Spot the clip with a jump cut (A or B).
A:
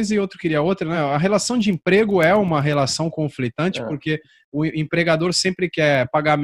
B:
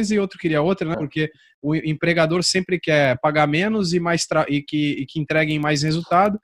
B